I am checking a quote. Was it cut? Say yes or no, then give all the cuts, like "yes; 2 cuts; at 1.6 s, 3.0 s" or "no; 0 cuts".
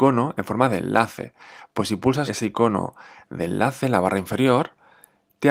yes; 1 cut; at 2.3 s